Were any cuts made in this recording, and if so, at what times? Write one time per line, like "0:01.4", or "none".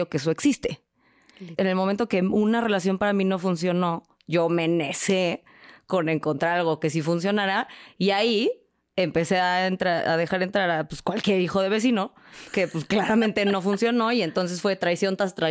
0:01.6